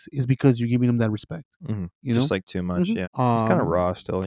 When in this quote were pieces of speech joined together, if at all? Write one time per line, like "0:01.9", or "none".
0:03.0